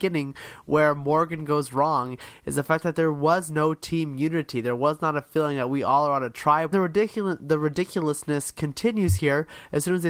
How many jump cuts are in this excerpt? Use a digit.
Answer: 1